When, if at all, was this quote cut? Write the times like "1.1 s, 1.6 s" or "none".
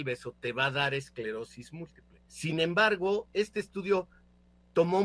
2.3 s